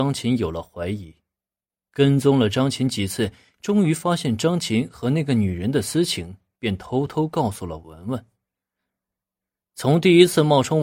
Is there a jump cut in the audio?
no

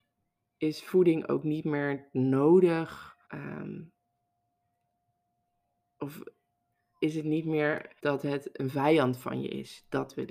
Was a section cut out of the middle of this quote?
yes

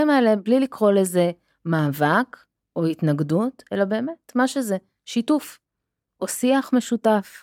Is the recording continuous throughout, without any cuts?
yes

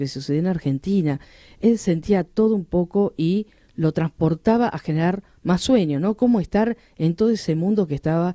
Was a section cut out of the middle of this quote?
no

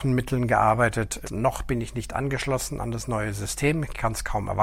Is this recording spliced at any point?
yes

